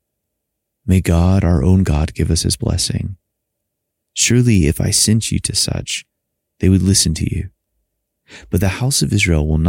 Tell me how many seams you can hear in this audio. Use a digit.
1